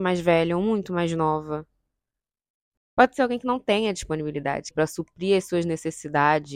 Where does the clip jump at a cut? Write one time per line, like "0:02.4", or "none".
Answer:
0:02.7
0:04.7